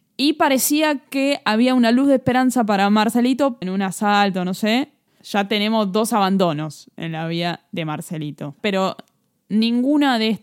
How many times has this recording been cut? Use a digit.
3